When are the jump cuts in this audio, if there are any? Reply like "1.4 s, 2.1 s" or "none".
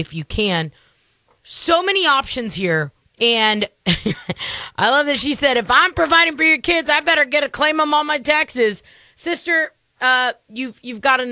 3.0 s